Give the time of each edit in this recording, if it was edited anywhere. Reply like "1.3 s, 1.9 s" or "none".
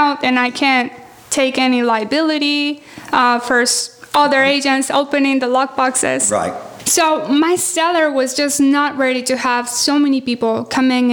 none